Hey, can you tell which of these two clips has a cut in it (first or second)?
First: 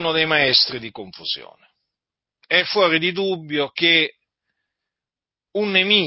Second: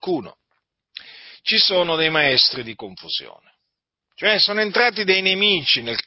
second